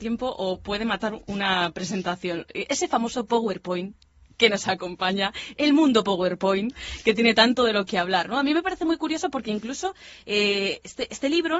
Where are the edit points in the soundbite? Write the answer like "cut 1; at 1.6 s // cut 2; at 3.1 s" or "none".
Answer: none